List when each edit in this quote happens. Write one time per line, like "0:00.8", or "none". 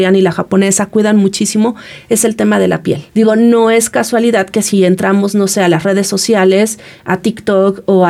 0:03.1